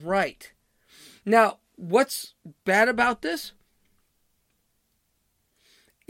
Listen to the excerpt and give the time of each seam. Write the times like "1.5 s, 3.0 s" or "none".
none